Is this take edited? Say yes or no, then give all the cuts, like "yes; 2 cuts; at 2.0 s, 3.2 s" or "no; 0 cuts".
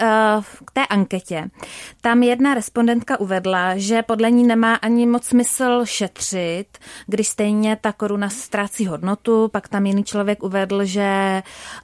no; 0 cuts